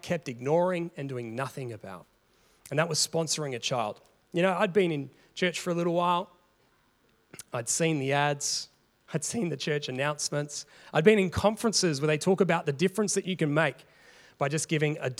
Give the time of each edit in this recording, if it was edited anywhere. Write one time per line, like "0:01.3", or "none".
none